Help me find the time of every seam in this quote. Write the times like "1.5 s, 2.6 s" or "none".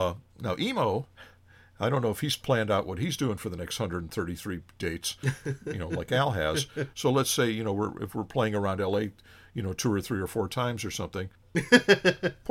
6.9 s, 11.4 s